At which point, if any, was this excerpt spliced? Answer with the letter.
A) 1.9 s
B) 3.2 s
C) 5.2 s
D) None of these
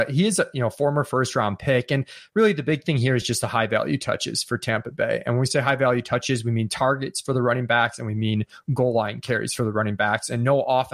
D